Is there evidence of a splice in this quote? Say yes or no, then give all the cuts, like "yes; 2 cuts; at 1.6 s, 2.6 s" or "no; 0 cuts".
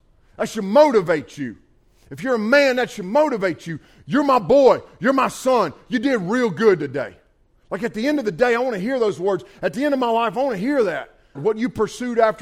yes; 1 cut; at 11.3 s